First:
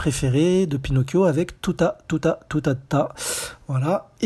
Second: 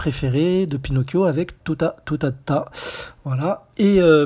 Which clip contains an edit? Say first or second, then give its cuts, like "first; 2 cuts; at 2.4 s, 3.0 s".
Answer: second; 1 cut; at 1.6 s